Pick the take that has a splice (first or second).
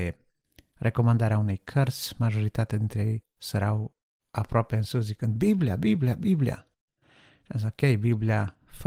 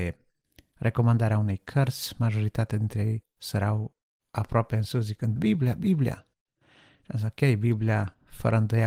second